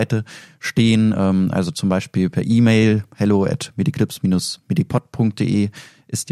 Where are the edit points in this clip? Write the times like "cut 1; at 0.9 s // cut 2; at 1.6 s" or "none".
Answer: none